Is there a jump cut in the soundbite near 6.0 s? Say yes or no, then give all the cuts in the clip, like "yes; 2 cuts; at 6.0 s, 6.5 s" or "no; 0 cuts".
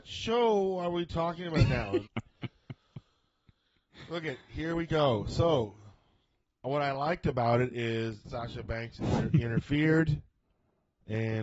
no; 2 cuts; at 2.0 s, 8.2 s